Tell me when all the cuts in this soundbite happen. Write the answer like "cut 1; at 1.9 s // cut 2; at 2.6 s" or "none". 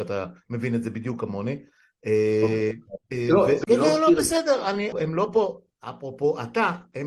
cut 1; at 3.6 s // cut 2; at 4.9 s